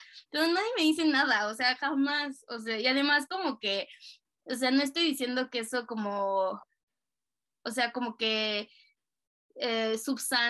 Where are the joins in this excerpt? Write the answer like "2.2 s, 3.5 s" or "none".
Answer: none